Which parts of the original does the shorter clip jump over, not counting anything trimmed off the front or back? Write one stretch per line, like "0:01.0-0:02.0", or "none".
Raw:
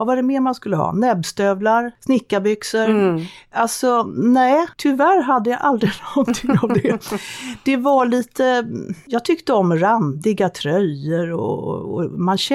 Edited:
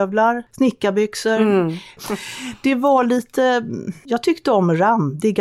0:03.5-0:07.0